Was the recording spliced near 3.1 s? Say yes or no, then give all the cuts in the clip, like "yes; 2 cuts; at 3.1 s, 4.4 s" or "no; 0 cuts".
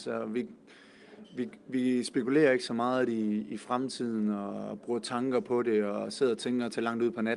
no; 0 cuts